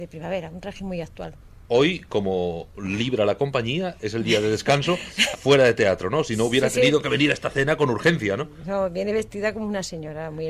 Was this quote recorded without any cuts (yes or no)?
no